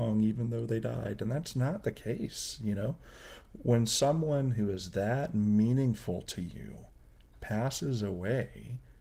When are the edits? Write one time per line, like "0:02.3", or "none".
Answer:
none